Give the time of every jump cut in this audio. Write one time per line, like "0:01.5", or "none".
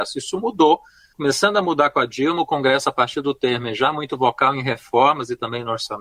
none